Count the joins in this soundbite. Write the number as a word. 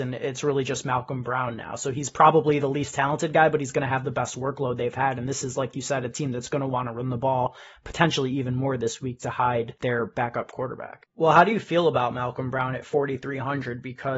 one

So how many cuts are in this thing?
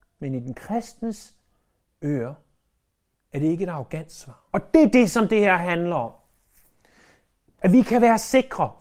one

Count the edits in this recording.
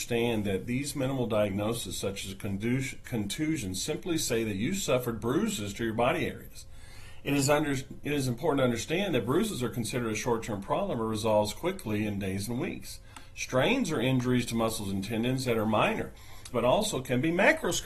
one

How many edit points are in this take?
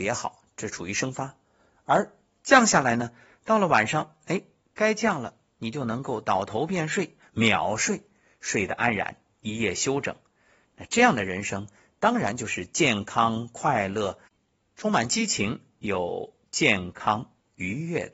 zero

